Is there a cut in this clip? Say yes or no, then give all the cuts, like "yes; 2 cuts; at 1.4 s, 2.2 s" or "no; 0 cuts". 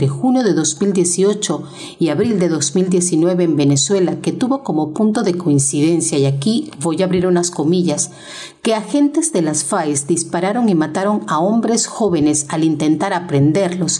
no; 0 cuts